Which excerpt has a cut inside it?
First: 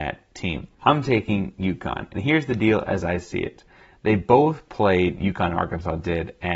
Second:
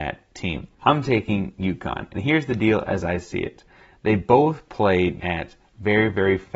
second; 1 cut; at 5.2 s

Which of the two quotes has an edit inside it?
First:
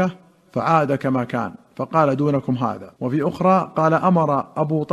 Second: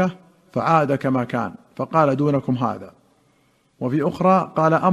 first; 1 cut; at 3.0 s

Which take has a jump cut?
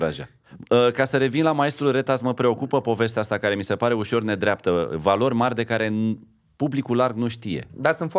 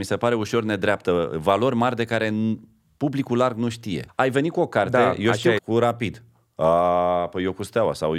second; 2 cuts; at 4.1 s, 5.6 s

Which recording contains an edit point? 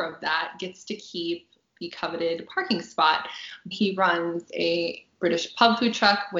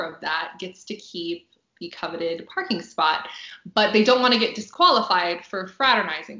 first; 1 cut; at 3.7 s

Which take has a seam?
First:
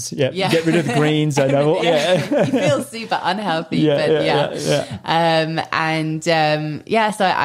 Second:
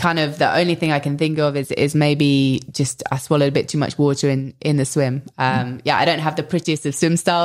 first; 1 cut; at 1.8 s

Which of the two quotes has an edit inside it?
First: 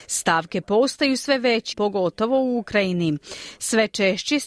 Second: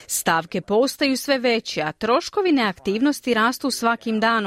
first; 1 cut; at 1.7 s

